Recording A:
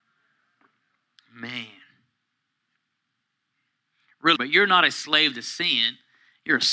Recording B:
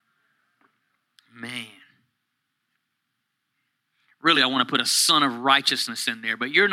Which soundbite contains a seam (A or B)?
A